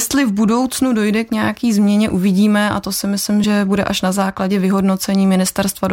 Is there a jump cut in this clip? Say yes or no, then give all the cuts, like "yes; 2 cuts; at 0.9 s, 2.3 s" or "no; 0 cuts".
no; 0 cuts